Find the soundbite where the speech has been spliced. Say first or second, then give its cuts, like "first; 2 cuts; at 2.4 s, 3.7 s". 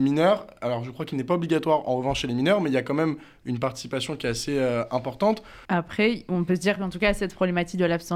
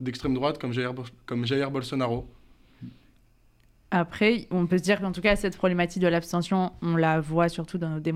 first; 1 cut; at 5.6 s